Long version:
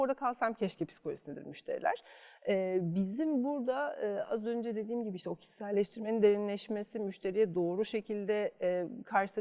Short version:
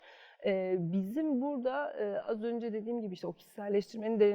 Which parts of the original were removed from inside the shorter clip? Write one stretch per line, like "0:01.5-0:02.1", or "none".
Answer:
none

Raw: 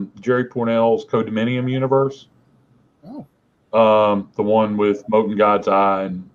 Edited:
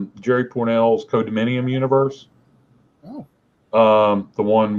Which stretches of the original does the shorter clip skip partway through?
none

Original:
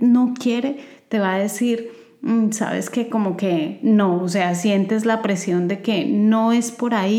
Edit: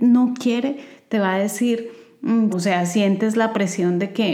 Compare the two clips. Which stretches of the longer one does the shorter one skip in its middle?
0:02.5-0:04.2

